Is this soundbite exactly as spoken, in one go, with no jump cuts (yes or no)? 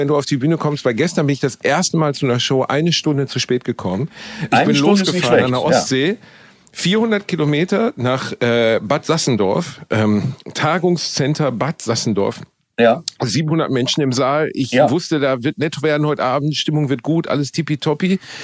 yes